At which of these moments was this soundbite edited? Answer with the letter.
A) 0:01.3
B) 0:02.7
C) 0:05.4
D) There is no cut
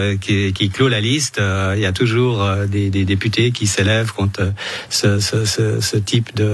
D